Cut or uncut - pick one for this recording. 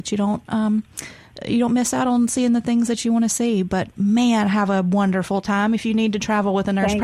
uncut